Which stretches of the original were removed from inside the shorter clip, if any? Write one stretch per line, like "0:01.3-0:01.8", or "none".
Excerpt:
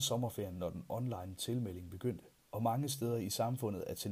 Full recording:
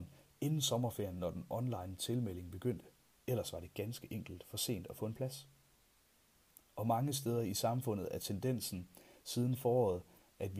0:03.1-0:06.7